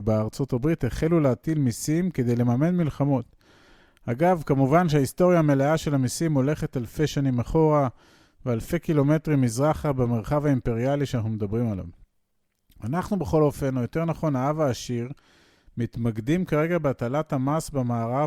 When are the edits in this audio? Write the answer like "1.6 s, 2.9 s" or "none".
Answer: none